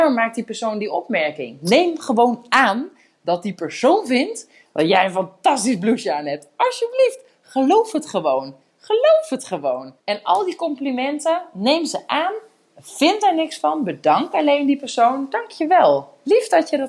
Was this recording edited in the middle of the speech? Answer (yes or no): yes